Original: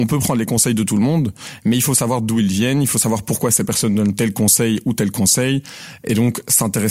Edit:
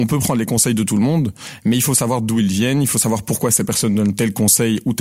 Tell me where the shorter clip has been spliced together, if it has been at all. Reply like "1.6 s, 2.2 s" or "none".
none